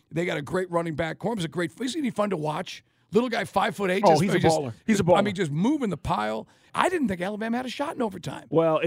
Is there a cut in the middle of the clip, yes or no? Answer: yes